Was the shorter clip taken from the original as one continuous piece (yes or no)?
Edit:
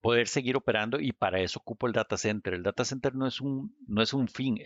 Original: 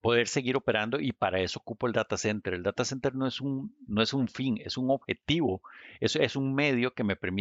yes